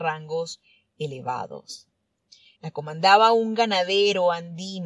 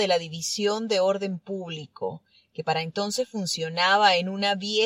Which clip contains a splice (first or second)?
first